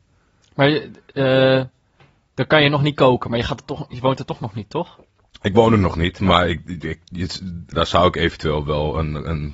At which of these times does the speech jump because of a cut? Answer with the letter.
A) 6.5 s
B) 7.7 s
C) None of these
B